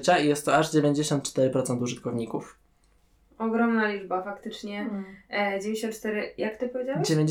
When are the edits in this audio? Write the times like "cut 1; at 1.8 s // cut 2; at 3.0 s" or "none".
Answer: none